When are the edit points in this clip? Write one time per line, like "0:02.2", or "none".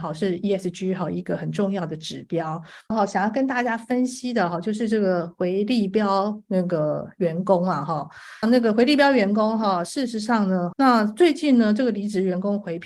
0:02.9
0:08.4
0:10.7